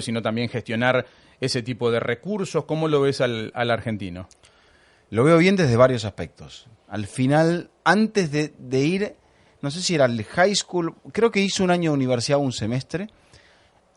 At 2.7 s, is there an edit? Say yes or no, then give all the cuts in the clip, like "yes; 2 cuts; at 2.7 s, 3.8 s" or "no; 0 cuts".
no; 1 cut; at 6.8 s